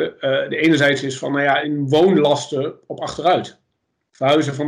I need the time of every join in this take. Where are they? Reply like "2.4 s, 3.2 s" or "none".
1.6 s